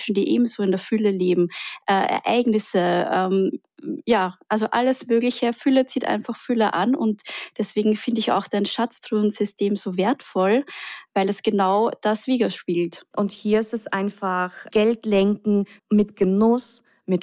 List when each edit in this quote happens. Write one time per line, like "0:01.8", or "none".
0:13.1
0:15.8